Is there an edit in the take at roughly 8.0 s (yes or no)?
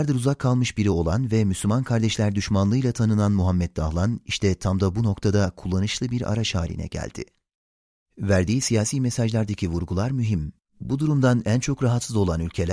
yes